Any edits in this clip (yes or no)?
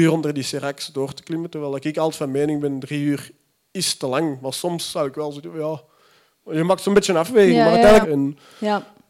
yes